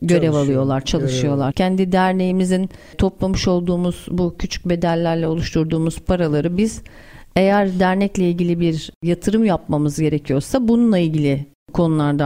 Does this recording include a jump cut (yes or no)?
yes